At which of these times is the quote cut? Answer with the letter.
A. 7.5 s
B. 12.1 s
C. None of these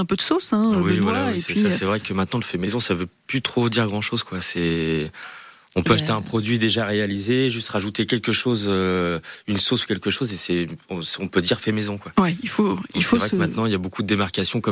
C